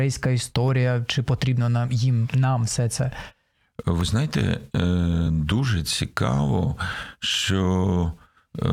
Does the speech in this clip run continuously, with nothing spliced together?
yes; 0 cuts

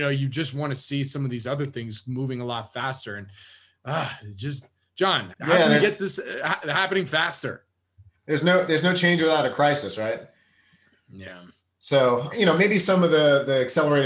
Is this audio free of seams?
no; 2 cuts; at 5.3 s, 12.3 s

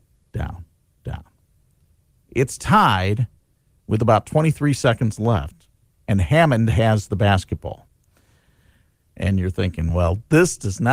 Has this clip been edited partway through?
no; 0 cuts

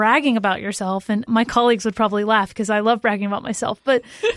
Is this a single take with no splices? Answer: yes; 0 cuts

